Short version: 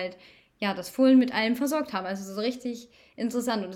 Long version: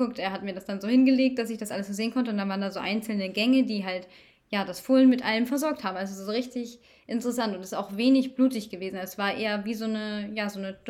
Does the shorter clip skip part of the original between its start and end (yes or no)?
no